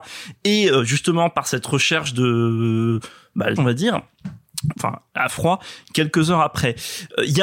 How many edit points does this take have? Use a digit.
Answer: 2